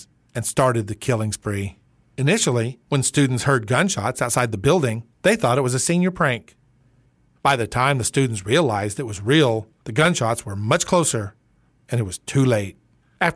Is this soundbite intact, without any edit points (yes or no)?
yes